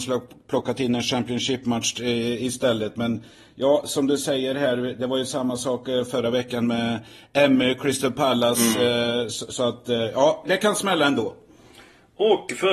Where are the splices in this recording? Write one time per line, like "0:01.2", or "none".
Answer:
0:10.4